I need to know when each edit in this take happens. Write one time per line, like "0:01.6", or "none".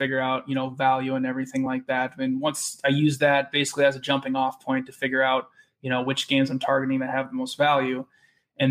none